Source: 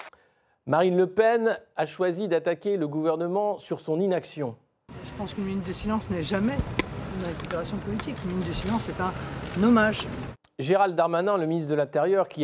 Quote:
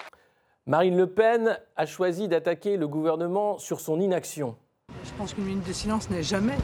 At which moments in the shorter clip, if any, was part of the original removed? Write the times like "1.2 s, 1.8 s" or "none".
none